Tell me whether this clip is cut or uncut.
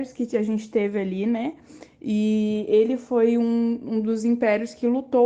uncut